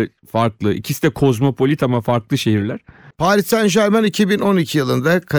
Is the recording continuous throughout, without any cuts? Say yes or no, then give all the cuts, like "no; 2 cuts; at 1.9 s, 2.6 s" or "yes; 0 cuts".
no; 1 cut; at 3.1 s